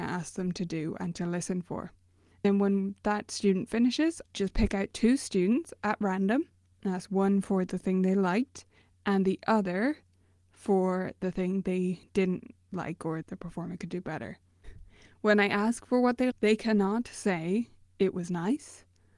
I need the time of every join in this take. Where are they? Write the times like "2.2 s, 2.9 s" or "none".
4.2 s, 14.6 s, 16.3 s